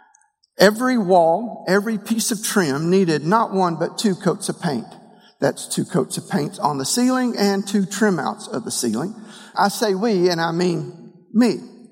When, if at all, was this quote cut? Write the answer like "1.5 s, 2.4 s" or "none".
9.5 s